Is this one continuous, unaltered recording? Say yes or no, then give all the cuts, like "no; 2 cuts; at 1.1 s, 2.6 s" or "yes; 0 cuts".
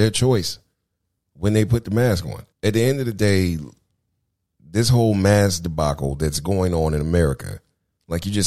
no; 1 cut; at 2.5 s